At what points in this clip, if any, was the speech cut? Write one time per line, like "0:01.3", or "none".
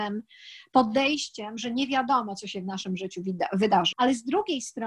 0:03.9